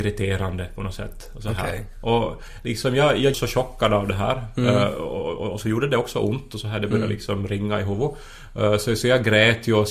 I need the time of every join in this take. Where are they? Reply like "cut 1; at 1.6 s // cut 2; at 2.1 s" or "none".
cut 1; at 3.3 s